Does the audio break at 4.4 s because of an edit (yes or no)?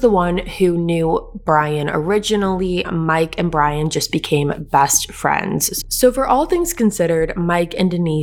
no